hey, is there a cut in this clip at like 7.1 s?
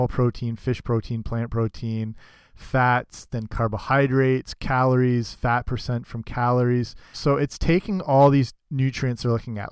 yes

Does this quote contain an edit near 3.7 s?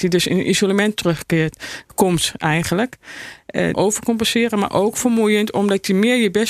yes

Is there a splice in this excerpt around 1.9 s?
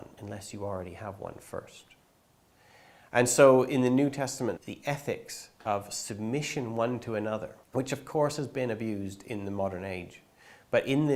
no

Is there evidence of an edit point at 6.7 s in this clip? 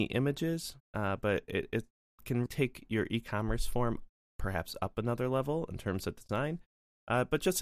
no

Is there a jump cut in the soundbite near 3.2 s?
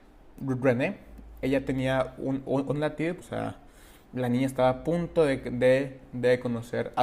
yes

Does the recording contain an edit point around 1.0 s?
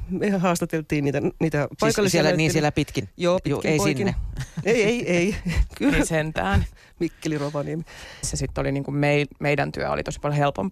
no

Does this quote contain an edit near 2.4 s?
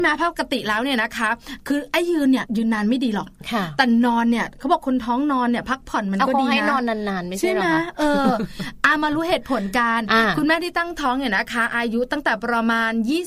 yes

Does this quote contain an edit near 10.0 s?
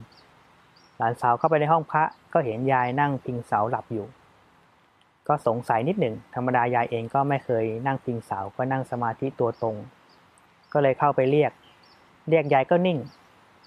no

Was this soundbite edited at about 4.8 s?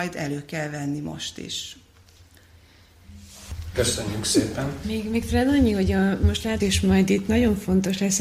yes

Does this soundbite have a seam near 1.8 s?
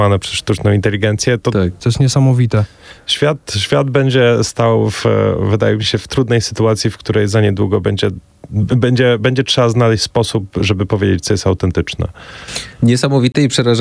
yes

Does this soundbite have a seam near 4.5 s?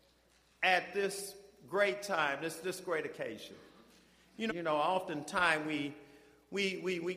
yes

